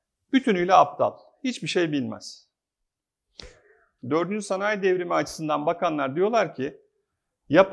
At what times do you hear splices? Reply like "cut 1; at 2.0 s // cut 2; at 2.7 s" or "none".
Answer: cut 1; at 4.0 s